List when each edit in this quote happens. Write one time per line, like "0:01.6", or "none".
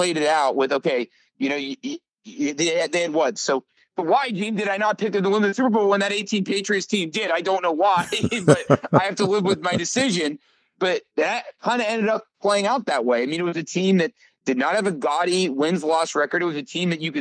0:03.3